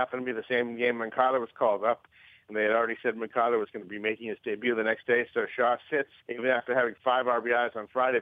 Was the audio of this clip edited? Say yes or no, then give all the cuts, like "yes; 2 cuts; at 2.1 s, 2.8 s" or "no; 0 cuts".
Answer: yes; 1 cut; at 6.2 s